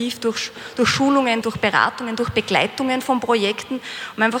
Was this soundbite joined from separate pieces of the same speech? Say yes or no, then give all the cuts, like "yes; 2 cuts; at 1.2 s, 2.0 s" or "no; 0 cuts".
yes; 1 cut; at 1.4 s